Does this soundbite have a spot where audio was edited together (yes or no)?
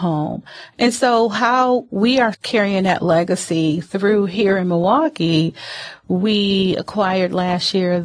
yes